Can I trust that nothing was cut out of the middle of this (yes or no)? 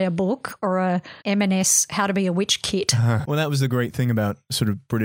no